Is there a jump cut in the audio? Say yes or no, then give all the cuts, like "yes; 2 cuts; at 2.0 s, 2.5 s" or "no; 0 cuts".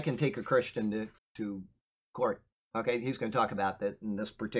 yes; 1 cut; at 1.2 s